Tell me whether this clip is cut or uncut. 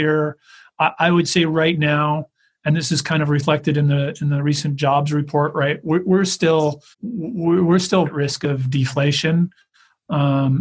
cut